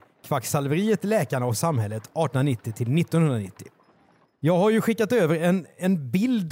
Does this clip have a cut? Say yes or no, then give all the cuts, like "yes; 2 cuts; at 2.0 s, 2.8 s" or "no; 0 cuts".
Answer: yes; 1 cut; at 4.3 s